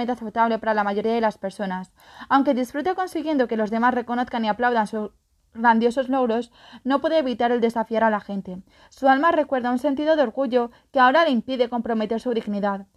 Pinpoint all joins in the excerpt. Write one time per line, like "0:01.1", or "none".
none